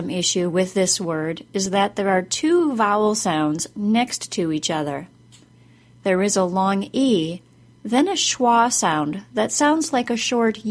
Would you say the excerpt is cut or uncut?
uncut